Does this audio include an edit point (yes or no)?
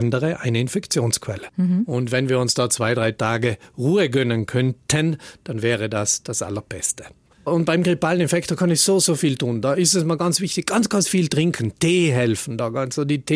no